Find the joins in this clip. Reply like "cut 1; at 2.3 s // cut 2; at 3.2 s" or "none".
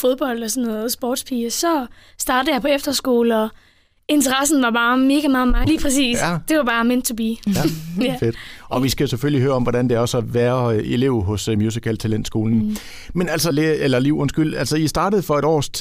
cut 1; at 5.6 s // cut 2; at 13.5 s